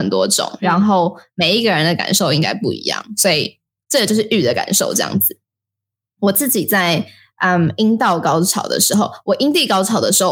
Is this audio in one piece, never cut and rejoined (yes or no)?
yes